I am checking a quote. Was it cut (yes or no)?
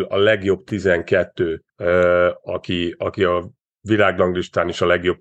yes